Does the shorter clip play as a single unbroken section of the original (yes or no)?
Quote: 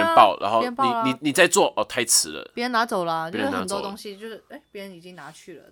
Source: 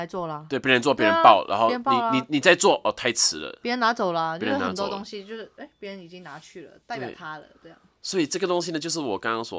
yes